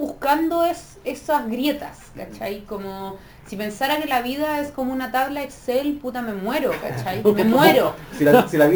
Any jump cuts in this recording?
no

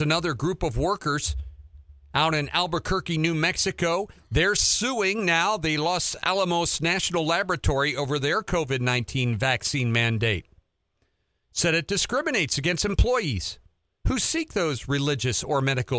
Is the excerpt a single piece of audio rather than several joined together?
yes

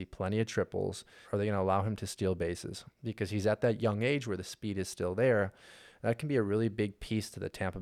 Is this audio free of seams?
no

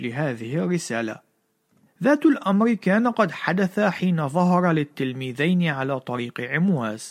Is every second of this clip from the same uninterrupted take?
no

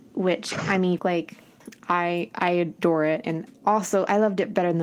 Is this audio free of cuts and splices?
no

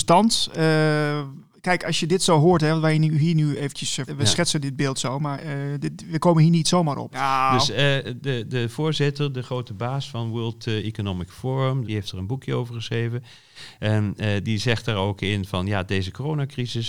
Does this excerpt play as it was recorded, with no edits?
no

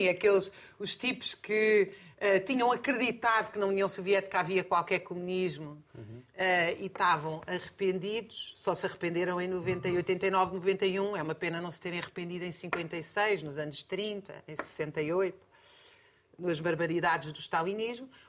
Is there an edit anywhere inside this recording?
no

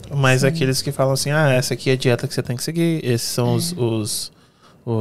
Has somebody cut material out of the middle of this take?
no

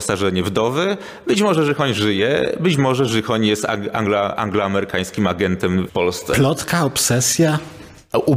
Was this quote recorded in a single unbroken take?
no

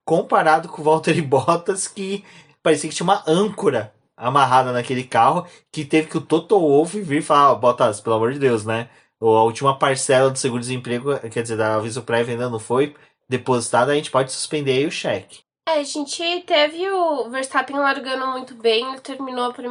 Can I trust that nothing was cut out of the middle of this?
yes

